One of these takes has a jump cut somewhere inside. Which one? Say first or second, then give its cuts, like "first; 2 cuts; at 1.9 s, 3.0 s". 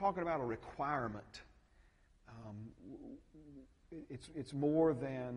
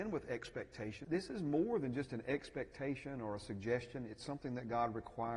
second; 1 cut; at 1.0 s